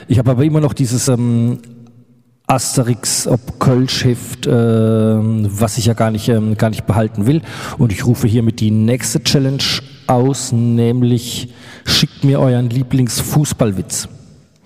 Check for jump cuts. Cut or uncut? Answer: uncut